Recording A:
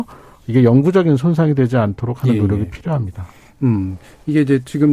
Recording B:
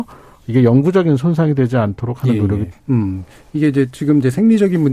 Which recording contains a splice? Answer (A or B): B